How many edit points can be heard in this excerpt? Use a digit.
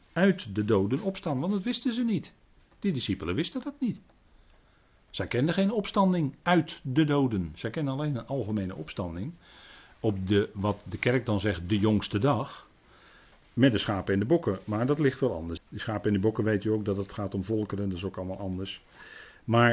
1